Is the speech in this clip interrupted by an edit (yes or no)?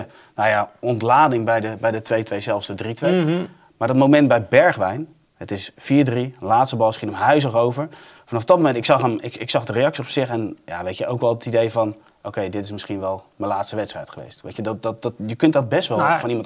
no